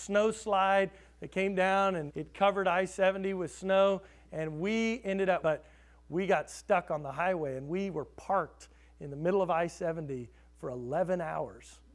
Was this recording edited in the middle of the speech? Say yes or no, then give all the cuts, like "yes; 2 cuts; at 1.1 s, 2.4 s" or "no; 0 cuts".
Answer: yes; 2 cuts; at 2.1 s, 5.4 s